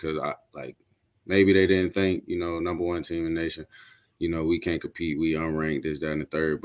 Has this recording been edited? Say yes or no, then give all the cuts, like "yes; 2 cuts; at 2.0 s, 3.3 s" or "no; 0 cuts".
no; 0 cuts